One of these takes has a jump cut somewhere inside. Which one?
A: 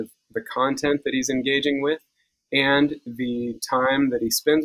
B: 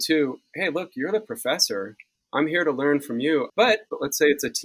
B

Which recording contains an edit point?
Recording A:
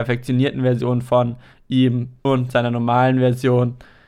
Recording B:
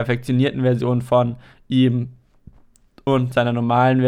A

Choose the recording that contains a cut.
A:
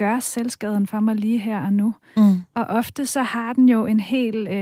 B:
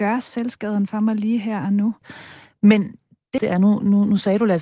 B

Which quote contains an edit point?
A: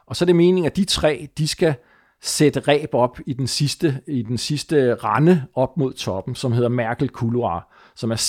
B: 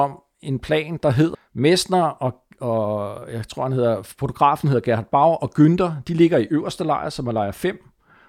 B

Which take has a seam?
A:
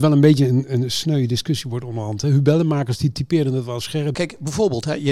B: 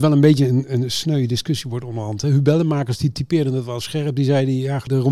A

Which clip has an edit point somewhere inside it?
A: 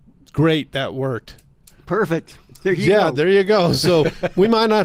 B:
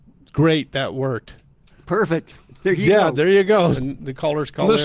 B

